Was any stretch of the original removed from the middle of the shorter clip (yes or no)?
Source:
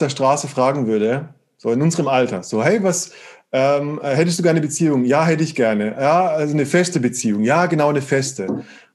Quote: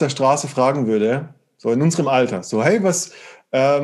no